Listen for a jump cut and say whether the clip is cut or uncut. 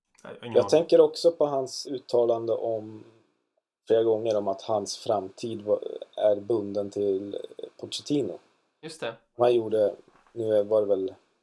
cut